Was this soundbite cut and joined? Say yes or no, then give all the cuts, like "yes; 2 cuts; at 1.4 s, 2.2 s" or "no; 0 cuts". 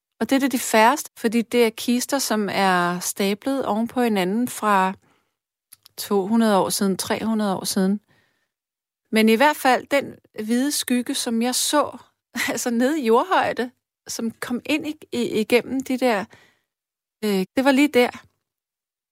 yes; 2 cuts; at 1.0 s, 17.4 s